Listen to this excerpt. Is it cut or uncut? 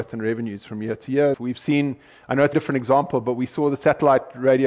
cut